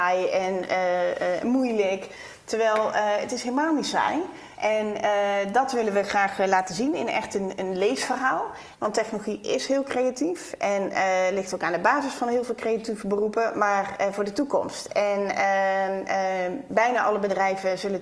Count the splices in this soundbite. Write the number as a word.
three